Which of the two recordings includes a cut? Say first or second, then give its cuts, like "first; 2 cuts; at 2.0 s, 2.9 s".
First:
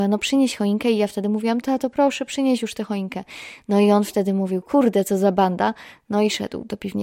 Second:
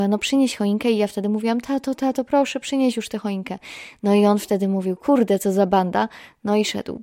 first; 1 cut; at 1.6 s